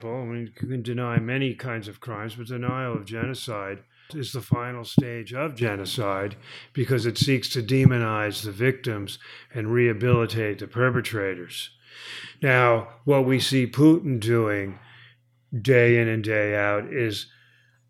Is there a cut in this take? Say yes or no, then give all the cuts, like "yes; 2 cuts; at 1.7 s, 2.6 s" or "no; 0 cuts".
yes; 1 cut; at 4.1 s